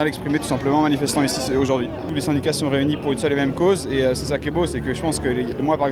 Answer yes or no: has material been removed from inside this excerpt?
no